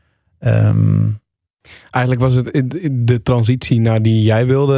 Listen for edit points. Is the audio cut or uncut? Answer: uncut